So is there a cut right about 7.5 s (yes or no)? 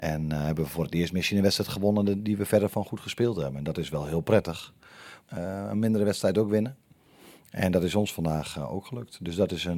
no